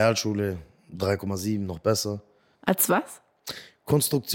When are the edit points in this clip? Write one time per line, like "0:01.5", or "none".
0:02.5